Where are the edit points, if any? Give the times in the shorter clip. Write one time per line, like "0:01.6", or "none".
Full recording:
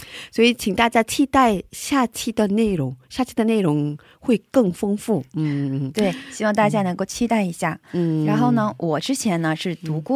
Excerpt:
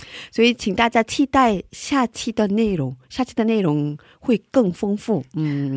none